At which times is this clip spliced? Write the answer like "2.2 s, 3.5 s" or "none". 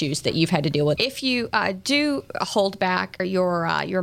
1.0 s